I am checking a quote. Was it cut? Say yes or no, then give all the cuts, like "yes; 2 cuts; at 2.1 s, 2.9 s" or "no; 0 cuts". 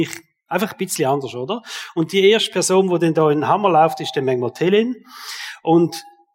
no; 0 cuts